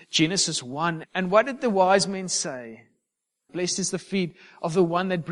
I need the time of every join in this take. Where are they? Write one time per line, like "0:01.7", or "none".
0:01.0
0:03.5